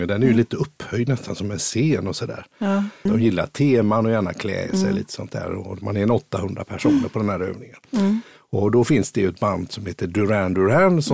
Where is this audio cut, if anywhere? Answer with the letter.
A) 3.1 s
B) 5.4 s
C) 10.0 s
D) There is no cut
A